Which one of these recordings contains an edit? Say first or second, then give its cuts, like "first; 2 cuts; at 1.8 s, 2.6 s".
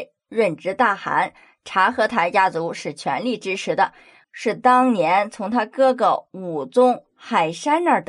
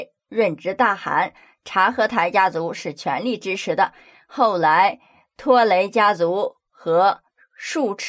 first; 1 cut; at 4.2 s